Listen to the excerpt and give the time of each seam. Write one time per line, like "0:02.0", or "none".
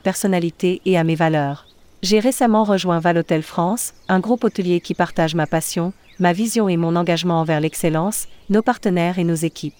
0:08.5